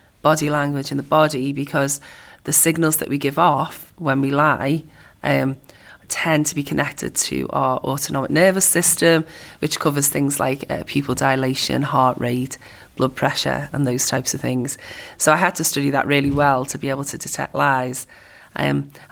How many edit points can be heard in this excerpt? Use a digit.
0